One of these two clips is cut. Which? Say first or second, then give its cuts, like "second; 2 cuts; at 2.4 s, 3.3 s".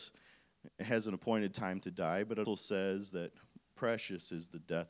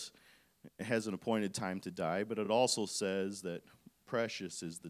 first; 1 cut; at 2.5 s